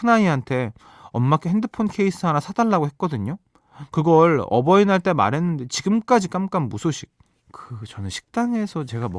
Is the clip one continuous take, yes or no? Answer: no